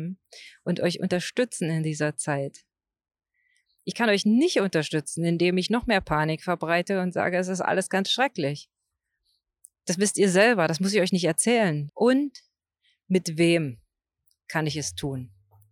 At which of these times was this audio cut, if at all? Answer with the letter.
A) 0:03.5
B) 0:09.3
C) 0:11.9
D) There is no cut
C